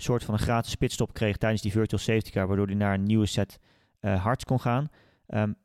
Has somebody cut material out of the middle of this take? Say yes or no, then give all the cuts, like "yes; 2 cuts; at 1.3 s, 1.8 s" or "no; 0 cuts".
no; 0 cuts